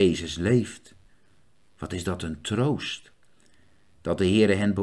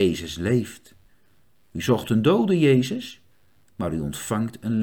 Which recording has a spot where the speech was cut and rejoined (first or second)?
first